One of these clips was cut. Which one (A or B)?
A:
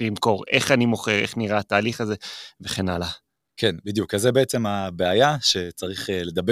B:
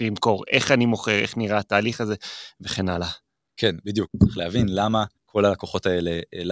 B